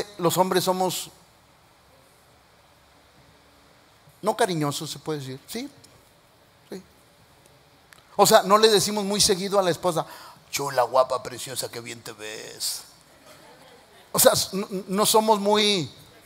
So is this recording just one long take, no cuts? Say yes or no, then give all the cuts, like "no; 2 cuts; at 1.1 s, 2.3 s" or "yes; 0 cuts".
yes; 0 cuts